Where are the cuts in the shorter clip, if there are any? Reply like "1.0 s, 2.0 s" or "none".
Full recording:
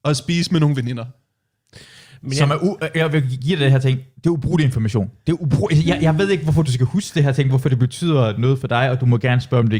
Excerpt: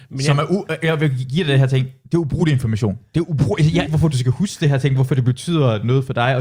3.9 s